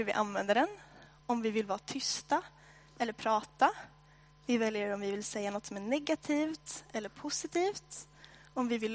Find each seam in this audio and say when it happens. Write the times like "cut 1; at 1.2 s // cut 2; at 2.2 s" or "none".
none